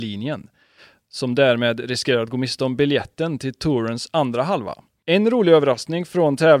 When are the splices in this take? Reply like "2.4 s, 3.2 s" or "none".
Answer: 5.0 s